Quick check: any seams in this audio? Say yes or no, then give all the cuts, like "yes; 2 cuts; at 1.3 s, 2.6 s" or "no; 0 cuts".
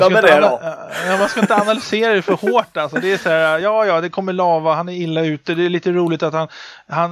no; 0 cuts